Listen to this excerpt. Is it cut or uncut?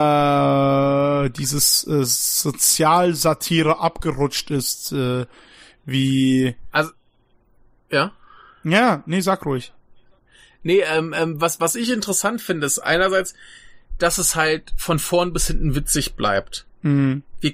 uncut